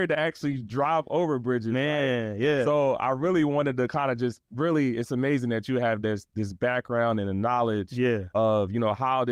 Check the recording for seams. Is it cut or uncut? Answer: uncut